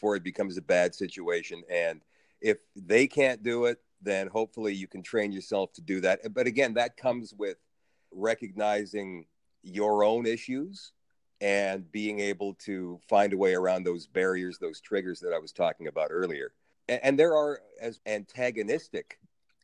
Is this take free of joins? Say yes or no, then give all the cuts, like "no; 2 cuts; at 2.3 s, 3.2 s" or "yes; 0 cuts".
no; 3 cuts; at 8.1 s, 16.7 s, 18.0 s